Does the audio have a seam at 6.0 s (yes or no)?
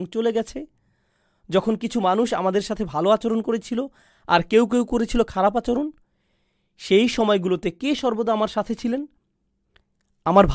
no